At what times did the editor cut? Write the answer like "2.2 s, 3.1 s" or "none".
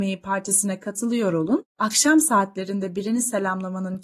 1.7 s